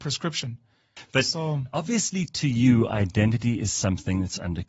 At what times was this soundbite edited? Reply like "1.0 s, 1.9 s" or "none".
1.0 s